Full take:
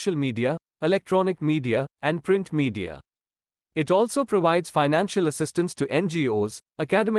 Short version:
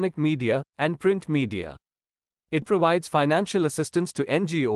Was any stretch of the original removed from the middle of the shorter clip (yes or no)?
yes